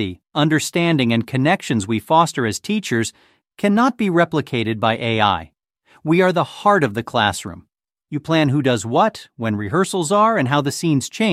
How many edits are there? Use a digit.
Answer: 1